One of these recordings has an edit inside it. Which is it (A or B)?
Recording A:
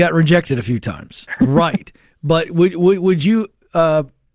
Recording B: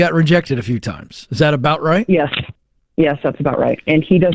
A